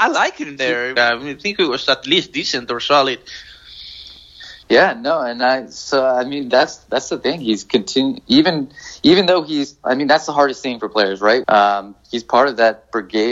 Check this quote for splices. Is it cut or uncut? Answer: cut